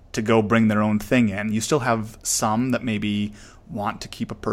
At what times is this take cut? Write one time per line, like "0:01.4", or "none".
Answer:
none